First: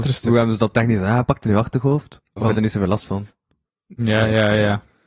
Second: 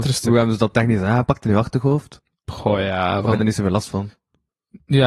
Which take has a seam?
first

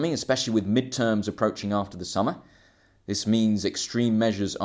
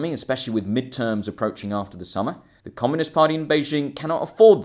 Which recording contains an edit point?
second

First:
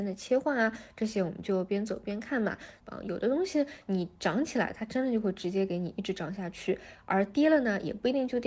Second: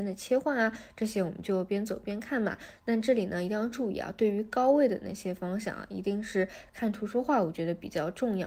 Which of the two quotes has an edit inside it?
first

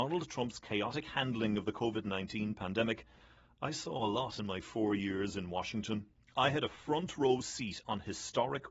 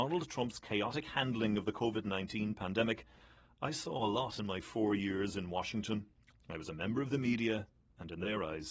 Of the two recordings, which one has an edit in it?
second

